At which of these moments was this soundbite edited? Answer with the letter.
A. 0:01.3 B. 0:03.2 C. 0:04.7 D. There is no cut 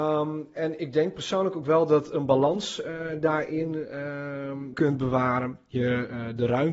C